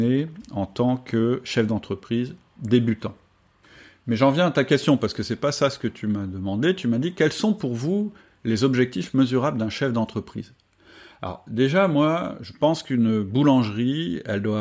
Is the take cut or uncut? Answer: uncut